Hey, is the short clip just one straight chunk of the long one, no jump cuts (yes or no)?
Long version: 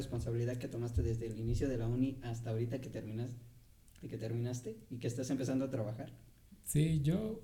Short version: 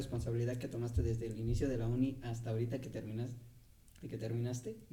yes